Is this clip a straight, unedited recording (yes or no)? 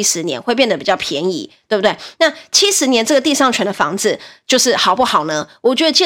yes